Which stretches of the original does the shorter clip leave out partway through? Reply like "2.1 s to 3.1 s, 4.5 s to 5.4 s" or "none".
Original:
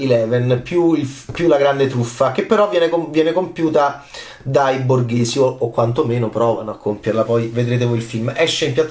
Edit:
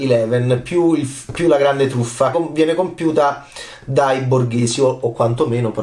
2.3 s to 2.9 s